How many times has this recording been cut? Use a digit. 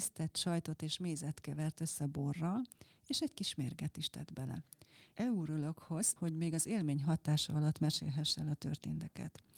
2